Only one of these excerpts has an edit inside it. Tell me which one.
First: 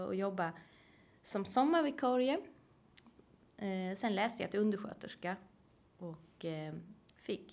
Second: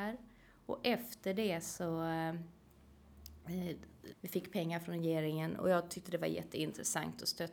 second; 1 cut; at 4.1 s

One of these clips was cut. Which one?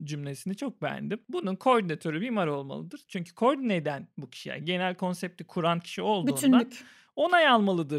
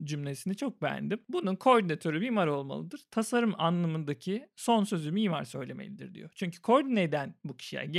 first; 1 cut; at 3.1 s

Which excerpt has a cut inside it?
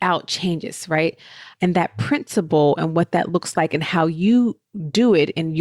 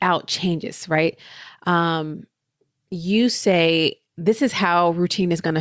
first; 1 cut; at 1.5 s

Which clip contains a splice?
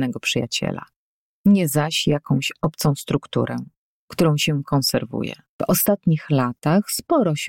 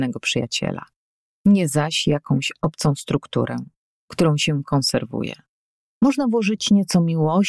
first; 1 cut; at 5.6 s

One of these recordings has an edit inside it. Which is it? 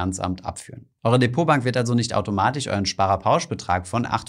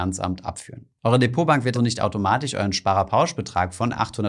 second; 1 cut; at 1.7 s

